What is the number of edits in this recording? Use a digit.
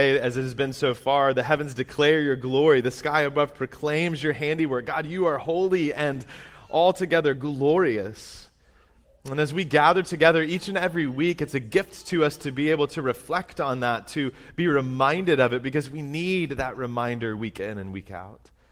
0